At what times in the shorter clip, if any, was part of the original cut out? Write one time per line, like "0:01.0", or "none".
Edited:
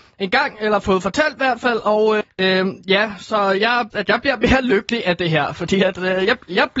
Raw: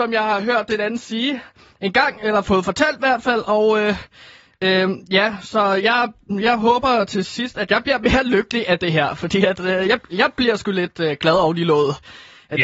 0:02.2
0:03.9